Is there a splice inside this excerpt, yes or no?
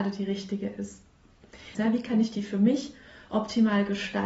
yes